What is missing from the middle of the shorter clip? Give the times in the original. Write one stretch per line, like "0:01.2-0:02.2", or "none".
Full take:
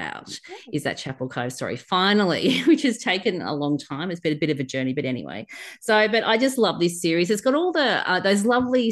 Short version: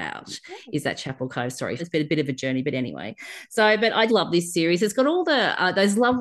0:01.8-0:04.1
0:06.4-0:06.6